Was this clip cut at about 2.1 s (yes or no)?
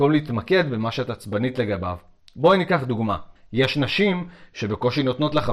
no